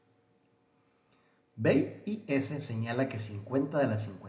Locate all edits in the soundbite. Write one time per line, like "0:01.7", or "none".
none